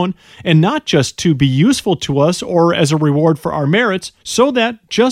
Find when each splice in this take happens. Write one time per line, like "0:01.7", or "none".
0:04.2